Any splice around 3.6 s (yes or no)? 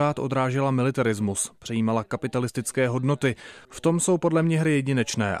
yes